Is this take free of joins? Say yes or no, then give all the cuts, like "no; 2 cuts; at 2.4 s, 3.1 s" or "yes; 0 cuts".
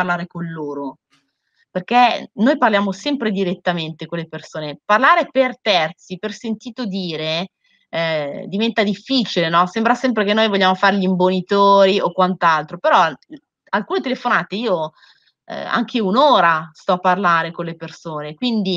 yes; 0 cuts